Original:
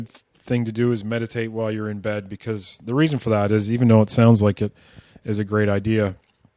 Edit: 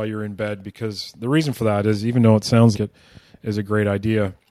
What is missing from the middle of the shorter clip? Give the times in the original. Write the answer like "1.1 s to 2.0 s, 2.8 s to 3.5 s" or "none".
4.4 s to 4.5 s